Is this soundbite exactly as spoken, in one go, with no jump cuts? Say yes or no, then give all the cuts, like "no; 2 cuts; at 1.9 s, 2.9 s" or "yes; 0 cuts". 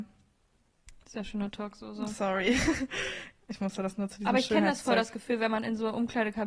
yes; 0 cuts